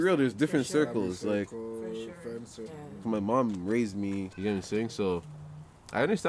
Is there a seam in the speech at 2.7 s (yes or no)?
yes